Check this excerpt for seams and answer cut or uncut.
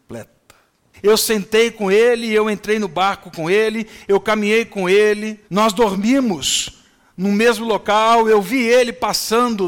cut